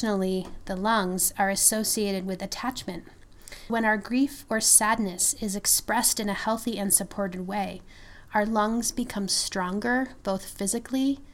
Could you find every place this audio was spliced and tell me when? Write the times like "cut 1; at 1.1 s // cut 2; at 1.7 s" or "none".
cut 1; at 3.7 s